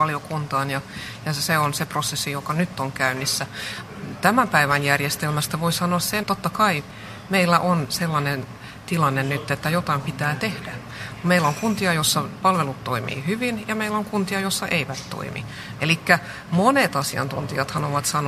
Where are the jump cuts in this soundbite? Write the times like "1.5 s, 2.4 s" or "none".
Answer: 6.2 s, 15.8 s